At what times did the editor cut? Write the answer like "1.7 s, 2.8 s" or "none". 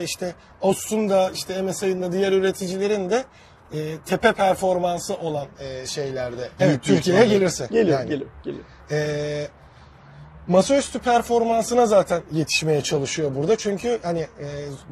6.6 s

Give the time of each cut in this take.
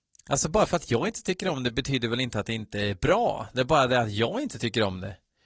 none

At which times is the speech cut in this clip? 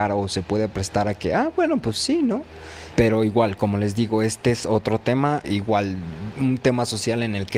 2.9 s, 5.4 s

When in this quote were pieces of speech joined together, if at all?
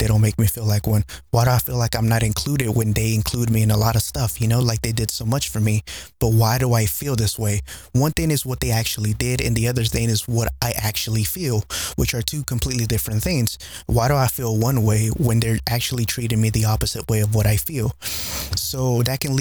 none

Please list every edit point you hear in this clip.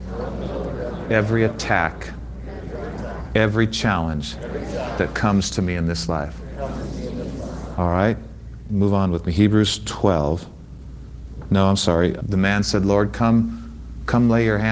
7.8 s, 12.2 s

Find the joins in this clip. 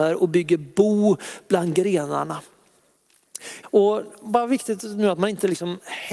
3.6 s

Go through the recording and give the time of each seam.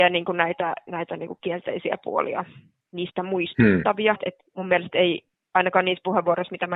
4.1 s

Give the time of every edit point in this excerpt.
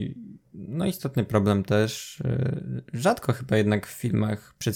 none

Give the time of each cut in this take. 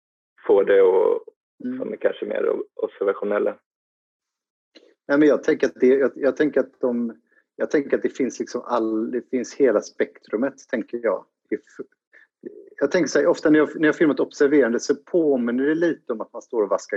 1.4 s

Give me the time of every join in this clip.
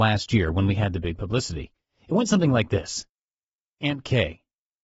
none

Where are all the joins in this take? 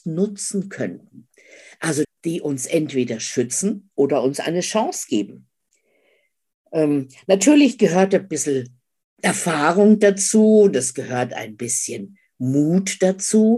2.0 s

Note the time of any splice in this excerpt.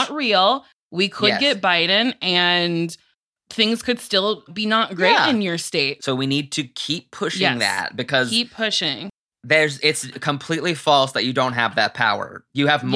4.5 s, 6.0 s, 9.8 s

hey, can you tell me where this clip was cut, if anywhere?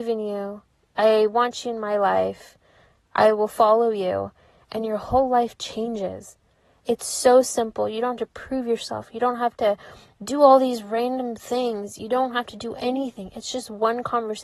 none

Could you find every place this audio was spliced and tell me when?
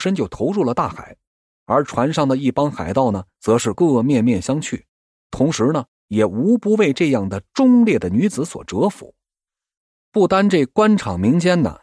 3.7 s

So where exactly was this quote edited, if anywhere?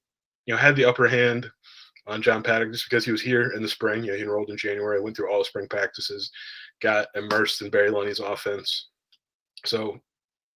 none

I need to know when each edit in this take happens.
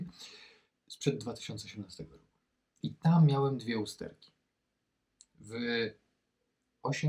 2.8 s

